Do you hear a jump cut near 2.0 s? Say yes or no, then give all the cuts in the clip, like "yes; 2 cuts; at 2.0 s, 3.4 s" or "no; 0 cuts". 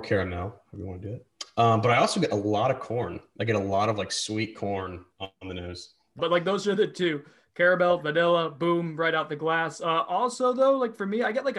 no; 1 cut; at 6.2 s